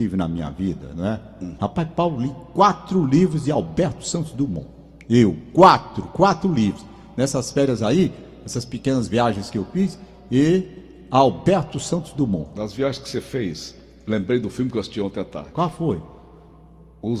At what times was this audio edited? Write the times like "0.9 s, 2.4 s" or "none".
1.6 s